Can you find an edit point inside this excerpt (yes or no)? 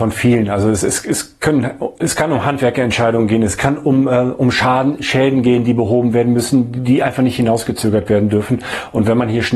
no